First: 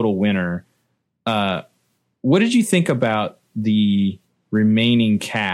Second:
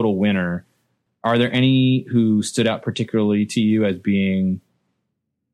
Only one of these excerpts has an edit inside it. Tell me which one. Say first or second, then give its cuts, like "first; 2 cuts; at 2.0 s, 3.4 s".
second; 1 cut; at 1.1 s